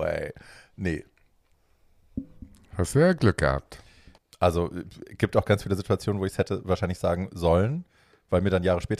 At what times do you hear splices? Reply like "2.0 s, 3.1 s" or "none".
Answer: 4.2 s